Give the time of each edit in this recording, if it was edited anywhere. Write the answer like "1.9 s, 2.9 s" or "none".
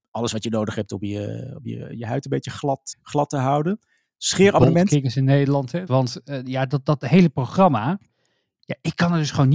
2.9 s, 5.9 s

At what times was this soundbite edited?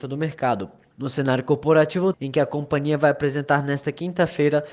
0.9 s, 2.1 s

